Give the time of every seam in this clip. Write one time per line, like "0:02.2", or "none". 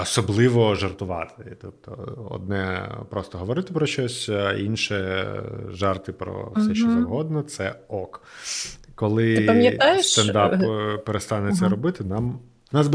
none

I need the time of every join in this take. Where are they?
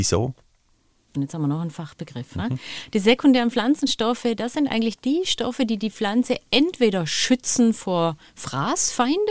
0:01.1

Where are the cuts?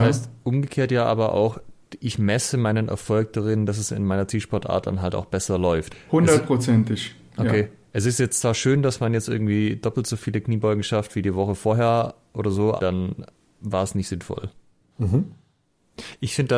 0:05.9
0:12.8
0:14.9

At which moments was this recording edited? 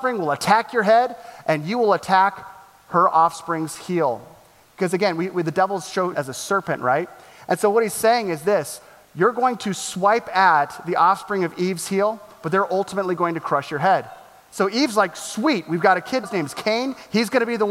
0:06.1
0:16.2

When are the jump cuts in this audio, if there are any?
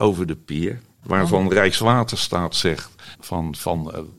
0:01.0
0:03.1

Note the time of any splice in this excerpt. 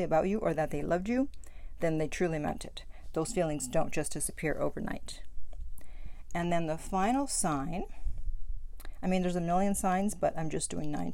none

